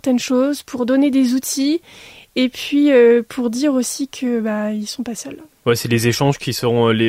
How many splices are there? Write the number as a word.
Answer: zero